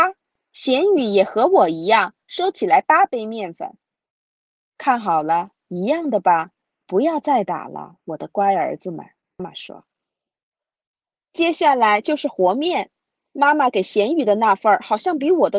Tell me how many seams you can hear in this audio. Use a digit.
1